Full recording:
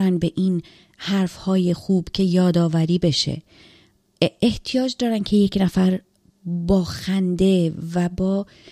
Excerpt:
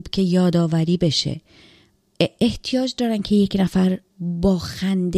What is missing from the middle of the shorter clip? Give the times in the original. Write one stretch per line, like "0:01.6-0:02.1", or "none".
0:06.1-0:06.3